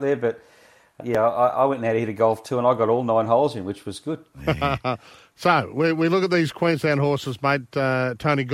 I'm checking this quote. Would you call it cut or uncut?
cut